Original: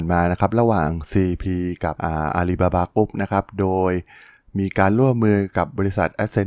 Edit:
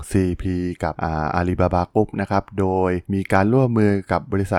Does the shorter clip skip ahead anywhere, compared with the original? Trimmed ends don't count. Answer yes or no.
yes